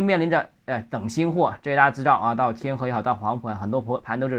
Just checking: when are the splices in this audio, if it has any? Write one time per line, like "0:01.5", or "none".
none